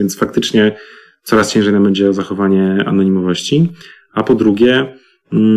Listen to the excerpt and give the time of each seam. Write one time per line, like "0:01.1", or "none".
none